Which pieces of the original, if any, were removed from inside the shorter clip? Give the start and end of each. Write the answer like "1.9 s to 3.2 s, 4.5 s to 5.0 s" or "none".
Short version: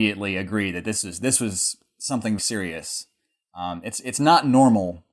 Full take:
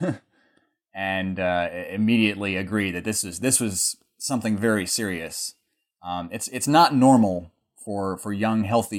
4.6 s to 4.9 s